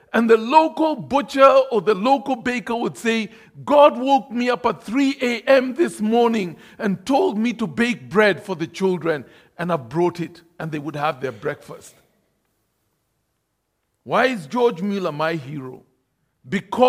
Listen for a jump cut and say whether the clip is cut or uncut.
uncut